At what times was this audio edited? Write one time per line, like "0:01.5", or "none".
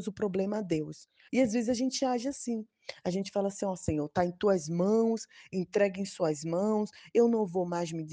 0:01.3